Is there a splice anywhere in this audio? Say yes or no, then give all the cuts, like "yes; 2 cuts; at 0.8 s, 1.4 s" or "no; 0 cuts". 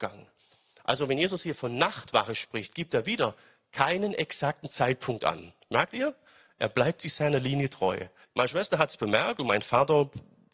yes; 1 cut; at 8.2 s